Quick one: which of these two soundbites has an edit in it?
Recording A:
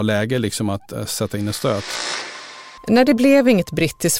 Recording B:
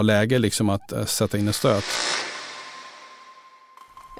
A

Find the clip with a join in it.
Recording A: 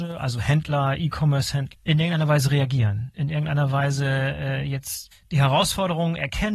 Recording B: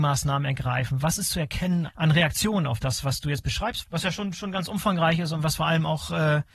A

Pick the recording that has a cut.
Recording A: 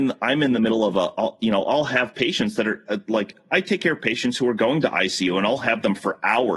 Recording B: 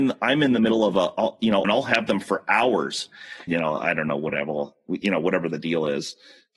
B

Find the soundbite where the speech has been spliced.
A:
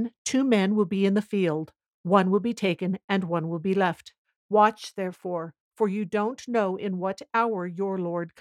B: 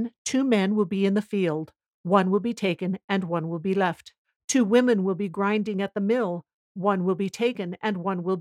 A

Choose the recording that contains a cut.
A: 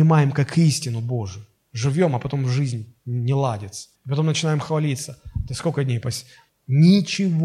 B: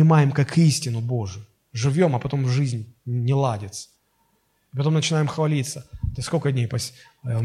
A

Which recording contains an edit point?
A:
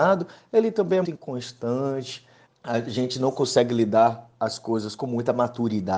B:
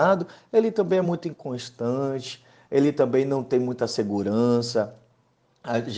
A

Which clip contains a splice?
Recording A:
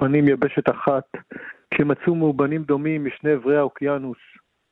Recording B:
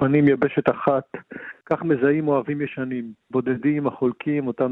B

